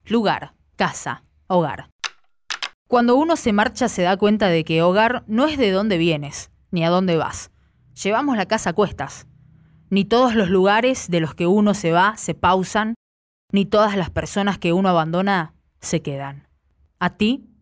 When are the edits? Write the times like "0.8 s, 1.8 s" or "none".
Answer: none